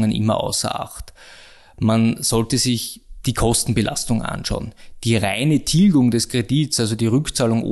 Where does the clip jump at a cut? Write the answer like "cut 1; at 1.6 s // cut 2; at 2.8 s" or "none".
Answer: none